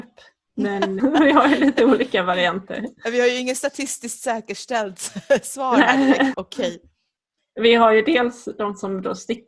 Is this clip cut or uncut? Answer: cut